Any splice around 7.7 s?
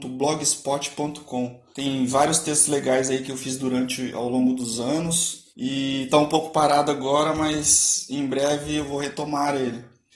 no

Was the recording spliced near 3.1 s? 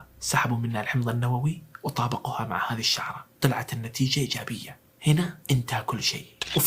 no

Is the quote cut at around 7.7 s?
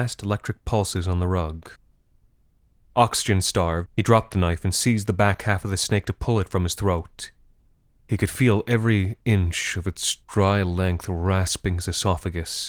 no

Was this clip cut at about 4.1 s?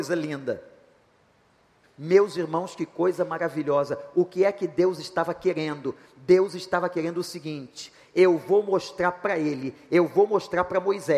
no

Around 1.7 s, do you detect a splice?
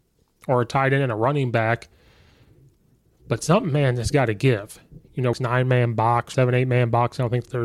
no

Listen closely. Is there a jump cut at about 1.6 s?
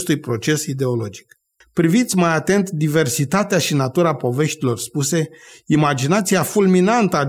yes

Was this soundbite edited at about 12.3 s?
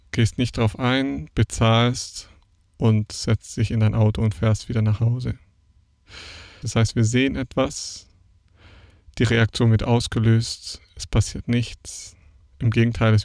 no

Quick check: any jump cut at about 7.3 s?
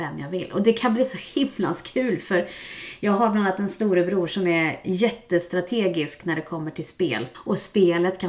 yes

